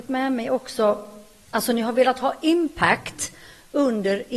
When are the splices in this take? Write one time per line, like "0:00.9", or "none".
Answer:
0:01.5